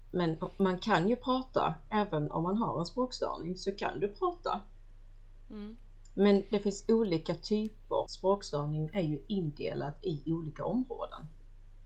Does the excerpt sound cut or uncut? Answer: cut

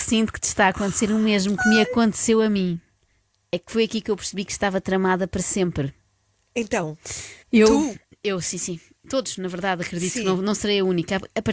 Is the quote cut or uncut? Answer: cut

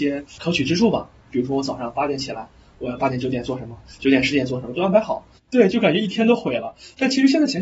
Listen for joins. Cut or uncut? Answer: cut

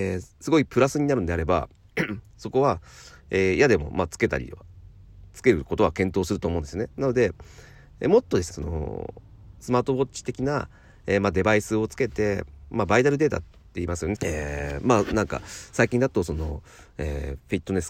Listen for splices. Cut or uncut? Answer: cut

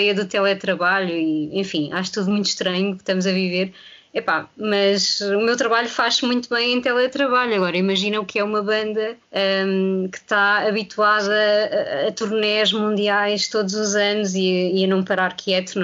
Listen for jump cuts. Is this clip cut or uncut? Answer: cut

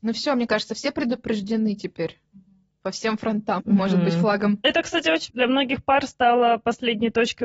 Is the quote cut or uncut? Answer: cut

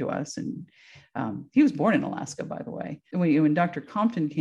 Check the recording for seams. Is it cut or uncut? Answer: cut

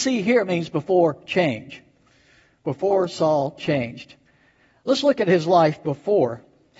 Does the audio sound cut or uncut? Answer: uncut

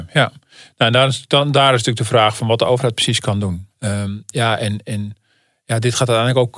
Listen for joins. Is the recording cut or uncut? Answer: cut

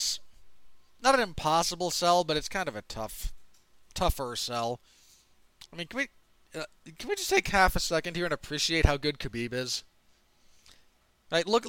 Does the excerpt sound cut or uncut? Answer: uncut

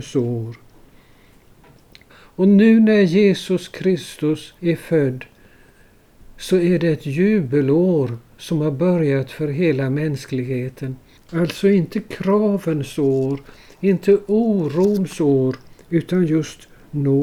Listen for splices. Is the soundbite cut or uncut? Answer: cut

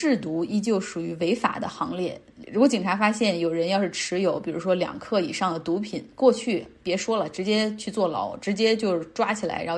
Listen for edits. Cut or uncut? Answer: uncut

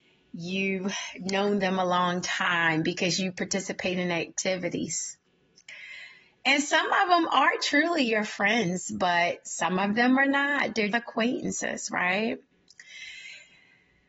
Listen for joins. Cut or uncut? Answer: cut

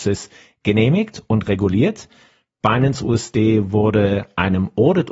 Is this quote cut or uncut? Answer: uncut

